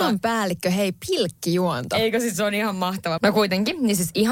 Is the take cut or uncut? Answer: cut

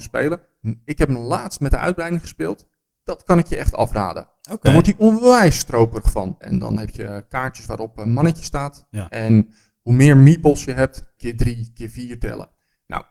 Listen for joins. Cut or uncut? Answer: cut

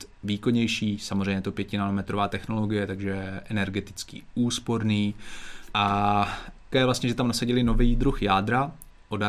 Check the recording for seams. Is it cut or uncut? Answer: cut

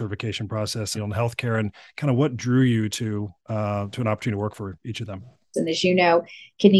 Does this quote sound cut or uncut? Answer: cut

